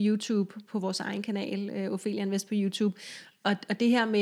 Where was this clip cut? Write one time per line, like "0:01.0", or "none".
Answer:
none